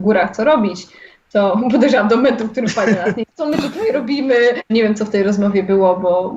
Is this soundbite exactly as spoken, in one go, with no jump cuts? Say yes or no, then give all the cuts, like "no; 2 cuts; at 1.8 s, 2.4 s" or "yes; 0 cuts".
no; 2 cuts; at 3.3 s, 4.7 s